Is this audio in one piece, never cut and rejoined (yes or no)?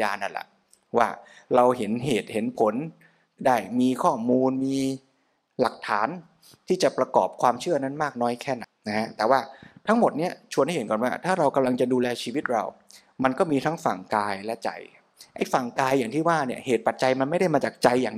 no